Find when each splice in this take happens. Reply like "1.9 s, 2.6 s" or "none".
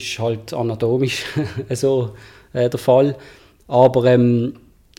none